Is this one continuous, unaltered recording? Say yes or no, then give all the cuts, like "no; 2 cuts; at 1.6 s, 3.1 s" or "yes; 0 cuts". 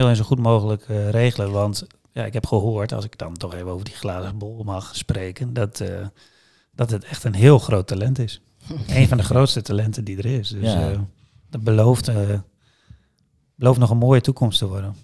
no; 1 cut; at 4.9 s